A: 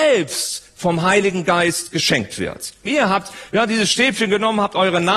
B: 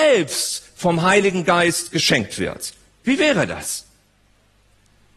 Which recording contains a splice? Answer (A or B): A